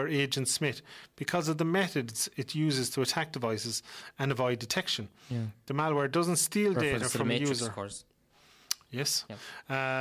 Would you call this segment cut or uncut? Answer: uncut